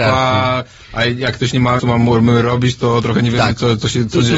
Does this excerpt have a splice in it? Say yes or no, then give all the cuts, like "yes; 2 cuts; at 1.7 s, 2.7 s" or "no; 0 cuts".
yes; 1 cut; at 1.8 s